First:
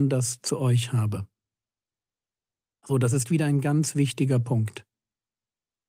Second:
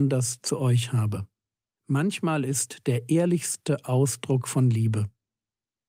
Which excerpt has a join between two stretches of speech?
second; 1 cut; at 1.8 s

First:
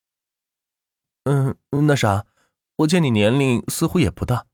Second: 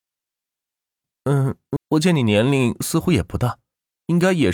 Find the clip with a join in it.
second; 1 cut; at 1.8 s

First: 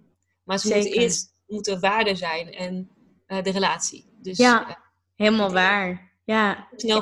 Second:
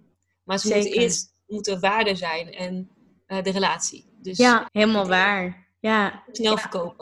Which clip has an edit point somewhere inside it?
second; 1 cut; at 4.7 s

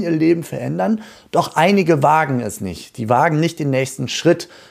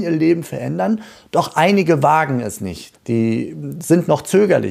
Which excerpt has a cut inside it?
second; 1 cut; at 2.9 s

